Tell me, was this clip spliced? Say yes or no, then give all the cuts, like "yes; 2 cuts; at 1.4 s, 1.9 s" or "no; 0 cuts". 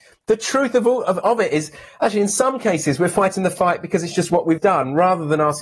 yes; 2 cuts; at 1.2 s, 4.6 s